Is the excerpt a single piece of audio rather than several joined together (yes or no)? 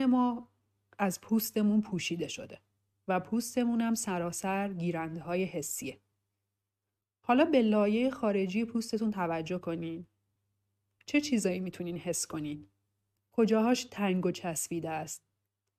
no